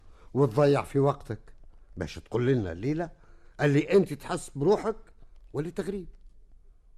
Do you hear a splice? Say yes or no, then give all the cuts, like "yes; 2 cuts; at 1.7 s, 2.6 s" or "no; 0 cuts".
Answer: no; 0 cuts